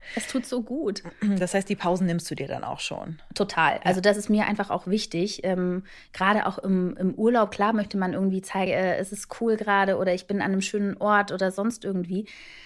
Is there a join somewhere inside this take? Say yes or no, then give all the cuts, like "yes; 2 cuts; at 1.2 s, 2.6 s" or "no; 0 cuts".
yes; 1 cut; at 8.7 s